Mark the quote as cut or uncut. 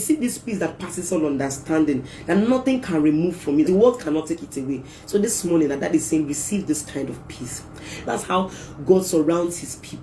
cut